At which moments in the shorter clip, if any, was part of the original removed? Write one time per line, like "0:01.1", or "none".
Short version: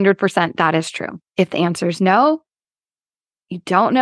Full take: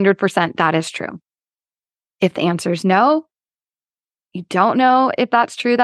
0:01.3